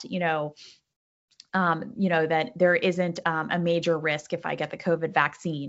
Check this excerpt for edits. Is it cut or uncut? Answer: uncut